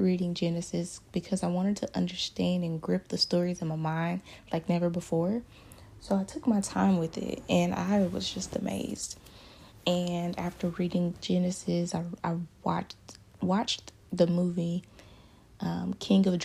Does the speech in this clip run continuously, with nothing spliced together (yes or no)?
yes